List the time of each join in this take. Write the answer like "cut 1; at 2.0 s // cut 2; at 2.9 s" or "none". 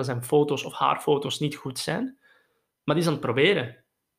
none

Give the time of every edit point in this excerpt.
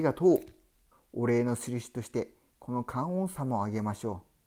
cut 1; at 0.9 s

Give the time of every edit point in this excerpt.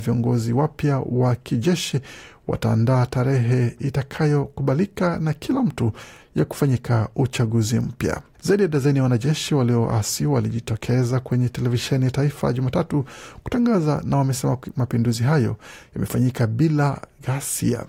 cut 1; at 8.3 s

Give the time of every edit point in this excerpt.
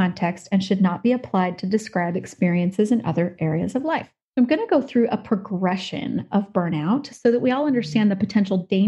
none

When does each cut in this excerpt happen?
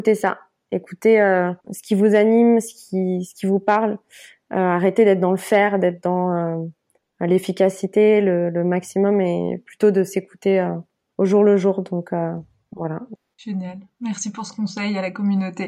none

